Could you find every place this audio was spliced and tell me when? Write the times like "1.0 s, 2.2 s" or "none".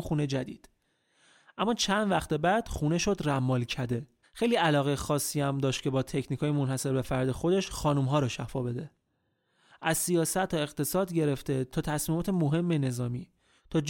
4.2 s, 9.7 s